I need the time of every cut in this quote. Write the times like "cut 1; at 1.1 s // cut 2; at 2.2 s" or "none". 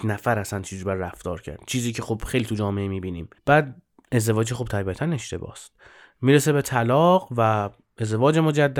cut 1; at 3.4 s